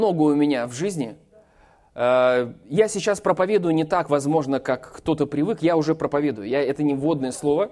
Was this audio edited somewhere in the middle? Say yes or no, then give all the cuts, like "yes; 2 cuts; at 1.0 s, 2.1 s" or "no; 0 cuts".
no; 0 cuts